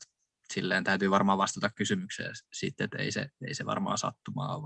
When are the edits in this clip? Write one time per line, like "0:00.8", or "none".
none